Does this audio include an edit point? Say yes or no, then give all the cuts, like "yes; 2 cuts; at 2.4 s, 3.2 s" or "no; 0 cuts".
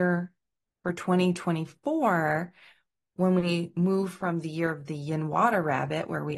no; 0 cuts